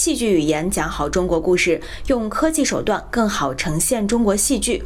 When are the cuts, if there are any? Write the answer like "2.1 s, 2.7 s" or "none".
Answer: none